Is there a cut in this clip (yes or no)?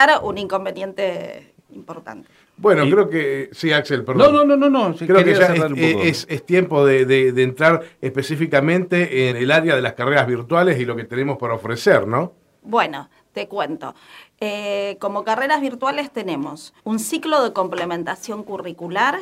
yes